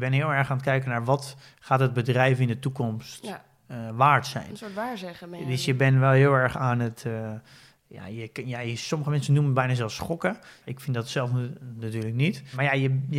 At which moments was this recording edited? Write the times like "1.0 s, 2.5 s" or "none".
none